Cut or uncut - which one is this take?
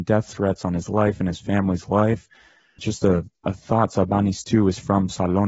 uncut